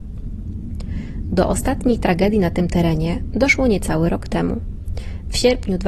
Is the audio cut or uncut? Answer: uncut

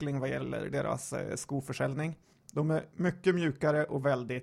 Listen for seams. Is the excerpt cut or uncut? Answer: cut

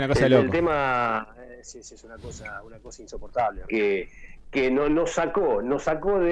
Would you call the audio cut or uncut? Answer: cut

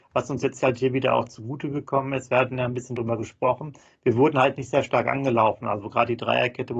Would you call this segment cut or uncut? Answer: uncut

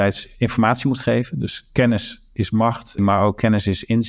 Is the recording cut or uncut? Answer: cut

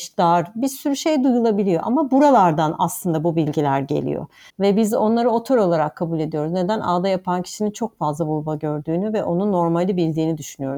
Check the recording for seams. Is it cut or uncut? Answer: uncut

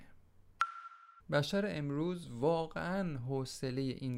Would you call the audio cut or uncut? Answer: cut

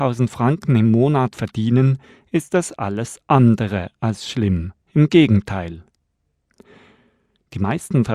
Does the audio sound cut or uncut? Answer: cut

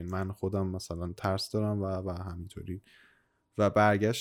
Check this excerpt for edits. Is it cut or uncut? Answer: uncut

